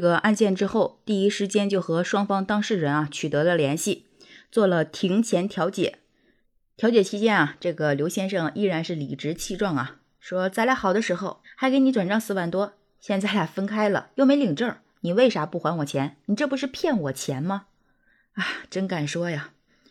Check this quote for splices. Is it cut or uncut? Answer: cut